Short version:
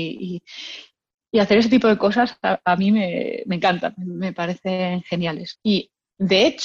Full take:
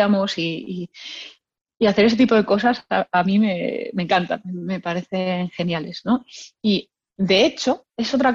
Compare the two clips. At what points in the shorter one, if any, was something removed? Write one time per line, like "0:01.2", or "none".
0:05.6